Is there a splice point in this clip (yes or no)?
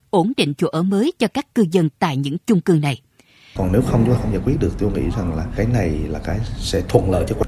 yes